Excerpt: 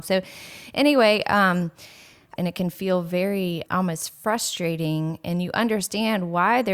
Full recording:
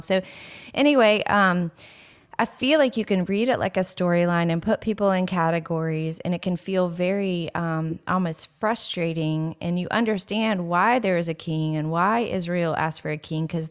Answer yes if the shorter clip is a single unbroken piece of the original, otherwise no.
no